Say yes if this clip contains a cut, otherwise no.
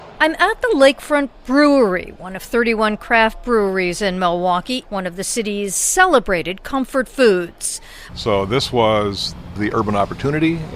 yes